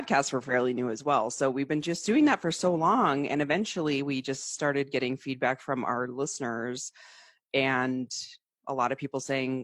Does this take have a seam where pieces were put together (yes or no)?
no